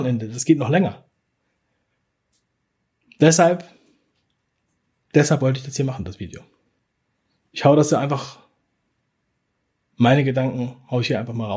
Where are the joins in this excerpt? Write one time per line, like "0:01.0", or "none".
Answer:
0:07.4

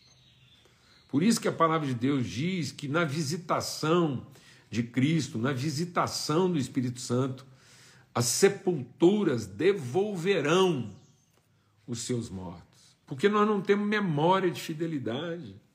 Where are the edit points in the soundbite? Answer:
0:13.0

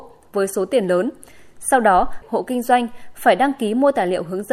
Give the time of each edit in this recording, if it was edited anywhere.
0:02.2

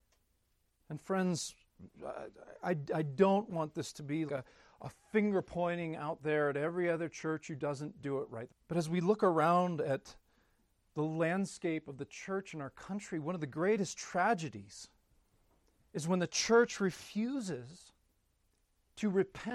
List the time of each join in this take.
0:04.3
0:08.5

